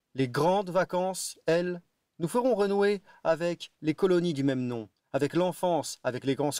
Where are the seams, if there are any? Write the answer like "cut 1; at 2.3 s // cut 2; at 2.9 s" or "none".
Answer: none